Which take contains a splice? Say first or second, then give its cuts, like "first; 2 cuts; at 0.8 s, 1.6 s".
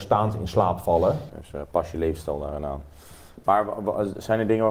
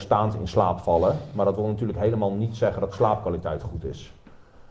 first; 1 cut; at 1.3 s